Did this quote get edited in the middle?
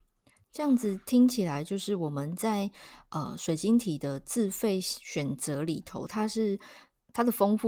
no; 0 cuts

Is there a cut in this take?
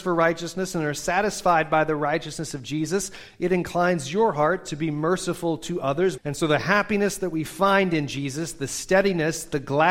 yes; 1 cut; at 6.2 s

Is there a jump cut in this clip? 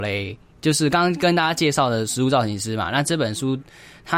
no; 0 cuts

